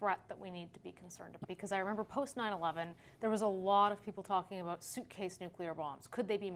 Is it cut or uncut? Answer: cut